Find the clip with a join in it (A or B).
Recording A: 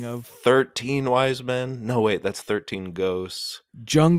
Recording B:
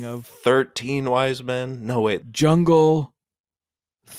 B